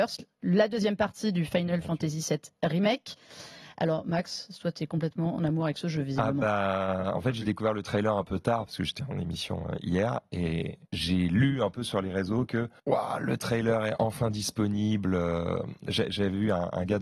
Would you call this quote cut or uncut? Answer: cut